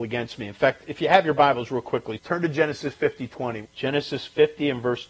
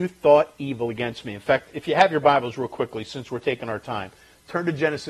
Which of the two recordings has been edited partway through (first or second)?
first